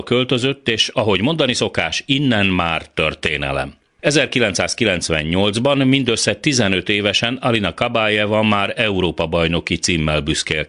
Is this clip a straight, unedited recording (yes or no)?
yes